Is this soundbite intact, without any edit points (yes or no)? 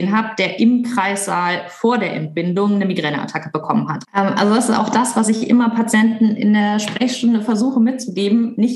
no